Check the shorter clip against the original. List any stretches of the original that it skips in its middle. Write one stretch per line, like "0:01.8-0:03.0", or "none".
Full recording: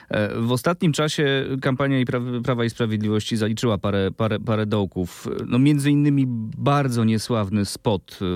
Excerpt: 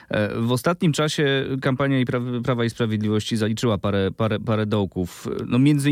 none